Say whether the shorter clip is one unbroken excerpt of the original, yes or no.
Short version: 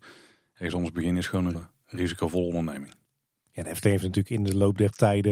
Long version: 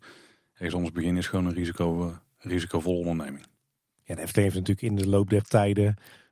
no